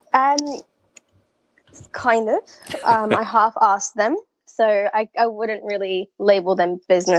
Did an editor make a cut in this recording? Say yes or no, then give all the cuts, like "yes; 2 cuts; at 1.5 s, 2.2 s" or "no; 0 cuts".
no; 0 cuts